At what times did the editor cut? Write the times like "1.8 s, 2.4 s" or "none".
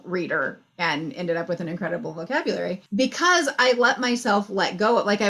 2.9 s